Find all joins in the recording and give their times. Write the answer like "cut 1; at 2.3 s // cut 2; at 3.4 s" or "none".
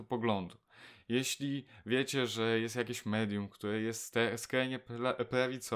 none